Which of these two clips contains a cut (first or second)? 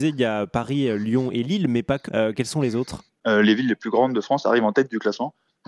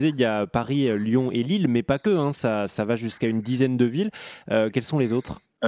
first